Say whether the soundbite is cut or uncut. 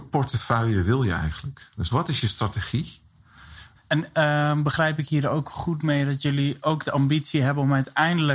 cut